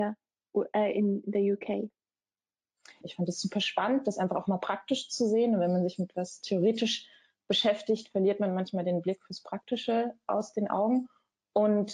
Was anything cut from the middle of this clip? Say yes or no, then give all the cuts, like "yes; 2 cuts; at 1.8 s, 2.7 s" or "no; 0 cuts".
yes; 1 cut; at 3.0 s